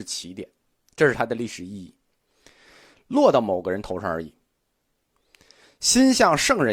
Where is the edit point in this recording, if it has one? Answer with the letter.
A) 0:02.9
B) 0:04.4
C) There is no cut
A